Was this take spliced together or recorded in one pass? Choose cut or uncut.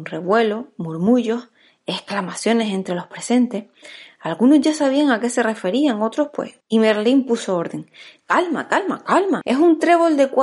cut